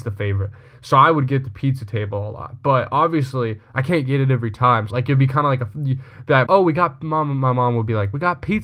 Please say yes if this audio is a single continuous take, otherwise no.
no